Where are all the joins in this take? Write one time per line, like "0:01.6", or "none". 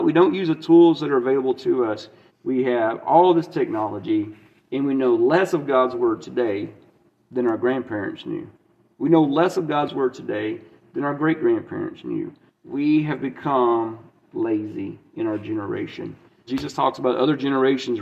0:02.3
0:12.5
0:16.5